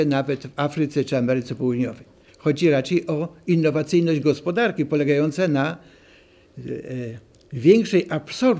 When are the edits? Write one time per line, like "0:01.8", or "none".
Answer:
0:02.3